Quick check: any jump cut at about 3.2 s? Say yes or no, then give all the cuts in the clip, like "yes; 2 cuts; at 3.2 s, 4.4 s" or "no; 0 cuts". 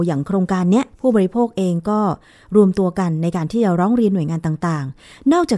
no; 1 cut; at 0.9 s